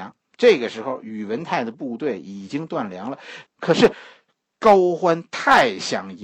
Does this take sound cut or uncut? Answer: cut